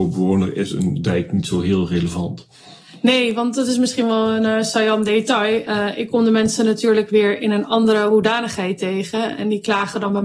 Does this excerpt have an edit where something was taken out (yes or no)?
no